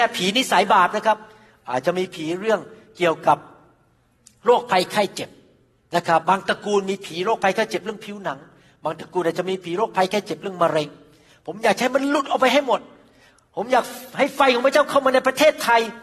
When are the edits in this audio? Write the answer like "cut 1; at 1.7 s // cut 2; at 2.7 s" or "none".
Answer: cut 1; at 6.2 s